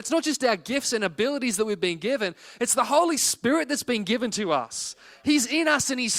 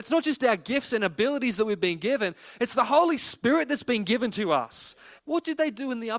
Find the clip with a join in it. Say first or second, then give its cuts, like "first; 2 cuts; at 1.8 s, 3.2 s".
second; 1 cut; at 5.2 s